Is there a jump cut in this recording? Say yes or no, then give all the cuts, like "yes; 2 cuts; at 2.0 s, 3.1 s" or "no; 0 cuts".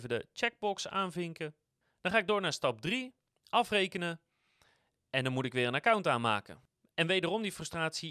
no; 0 cuts